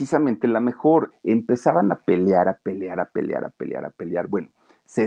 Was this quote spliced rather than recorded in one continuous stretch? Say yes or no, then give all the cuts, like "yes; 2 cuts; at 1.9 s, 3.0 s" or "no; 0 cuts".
yes; 1 cut; at 1.1 s